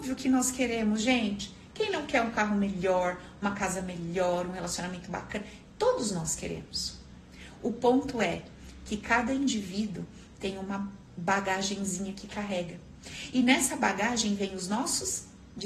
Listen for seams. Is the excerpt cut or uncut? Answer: cut